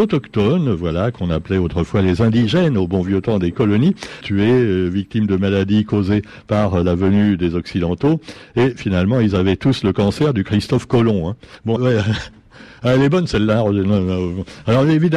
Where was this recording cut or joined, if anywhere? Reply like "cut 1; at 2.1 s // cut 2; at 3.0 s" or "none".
cut 1; at 4.2 s // cut 2; at 11.8 s

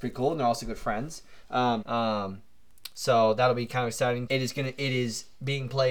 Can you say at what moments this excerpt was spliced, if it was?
cut 1; at 1.8 s // cut 2; at 4.3 s

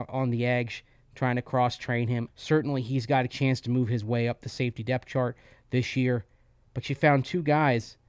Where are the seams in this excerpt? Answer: cut 1; at 2.3 s

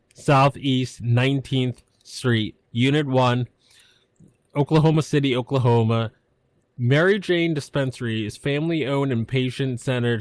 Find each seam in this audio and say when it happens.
cut 1; at 6.6 s

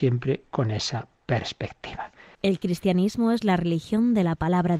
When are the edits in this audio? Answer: cut 1; at 2.3 s

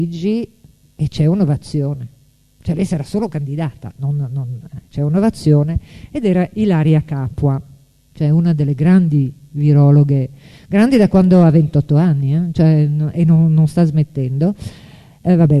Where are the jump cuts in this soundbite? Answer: none

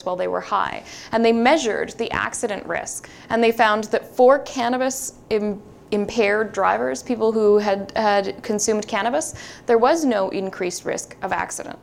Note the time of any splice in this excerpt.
none

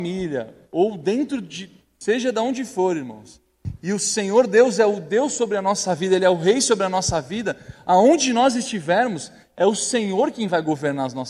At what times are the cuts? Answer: none

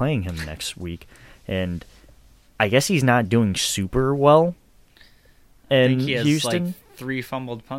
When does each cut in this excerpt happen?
none

